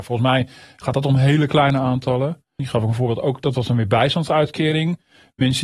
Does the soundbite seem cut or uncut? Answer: cut